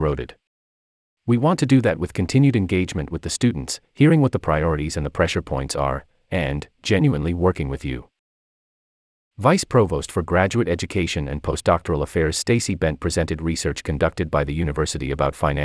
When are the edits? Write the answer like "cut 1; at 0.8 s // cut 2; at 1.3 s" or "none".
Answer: cut 1; at 3.8 s // cut 2; at 9.3 s